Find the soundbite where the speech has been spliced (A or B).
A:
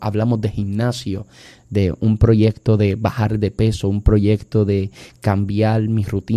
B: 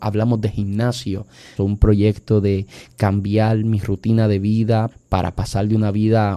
B